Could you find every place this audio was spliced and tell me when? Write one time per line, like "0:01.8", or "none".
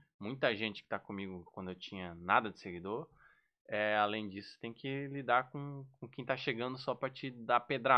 none